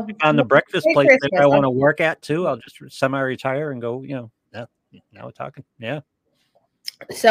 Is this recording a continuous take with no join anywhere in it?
no; 1 cut; at 4.5 s

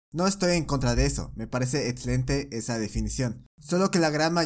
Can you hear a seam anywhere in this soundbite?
no; 0 cuts

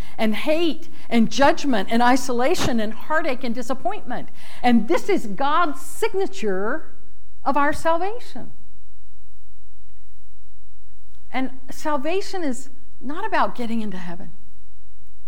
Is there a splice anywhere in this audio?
no; 0 cuts

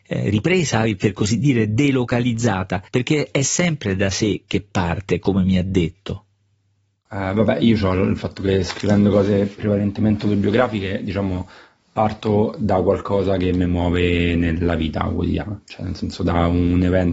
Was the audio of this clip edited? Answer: yes; 1 cut; at 2.9 s

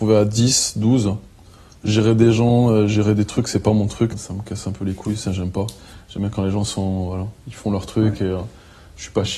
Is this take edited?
yes; 1 cut; at 4.1 s

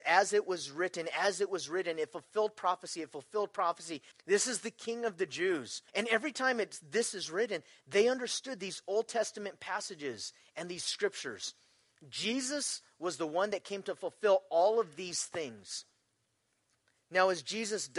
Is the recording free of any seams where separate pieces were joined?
no; 2 cuts; at 4.1 s, 5.9 s

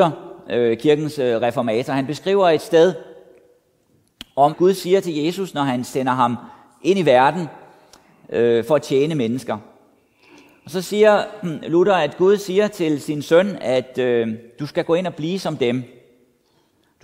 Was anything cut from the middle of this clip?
yes; 1 cut; at 4.5 s

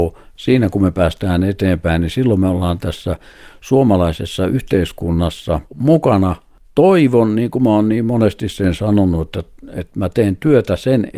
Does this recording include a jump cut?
yes; 1 cut; at 5.7 s

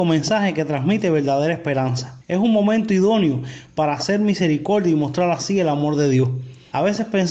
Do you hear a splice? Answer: no; 0 cuts

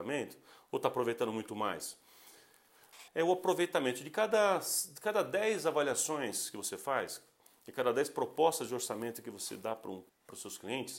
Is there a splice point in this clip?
yes; 2 cuts; at 3.1 s, 10.1 s

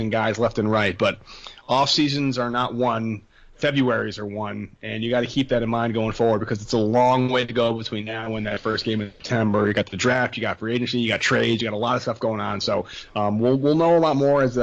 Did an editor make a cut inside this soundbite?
no; 0 cuts

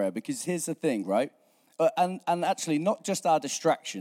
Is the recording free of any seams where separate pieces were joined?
yes; 0 cuts

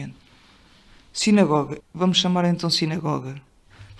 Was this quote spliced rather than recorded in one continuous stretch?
yes; 1 cut; at 1.8 s

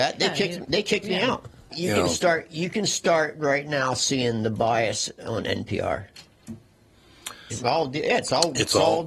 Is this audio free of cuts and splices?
no; 2 cuts; at 1.7 s, 7.5 s

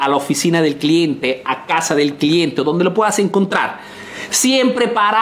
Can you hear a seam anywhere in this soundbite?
no; 0 cuts

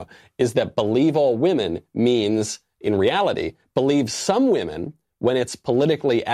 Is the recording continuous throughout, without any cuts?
yes; 0 cuts

